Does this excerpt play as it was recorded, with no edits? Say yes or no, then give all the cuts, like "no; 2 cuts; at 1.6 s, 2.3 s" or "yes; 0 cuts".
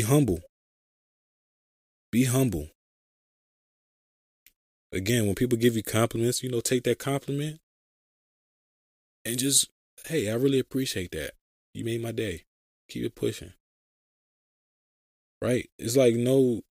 yes; 0 cuts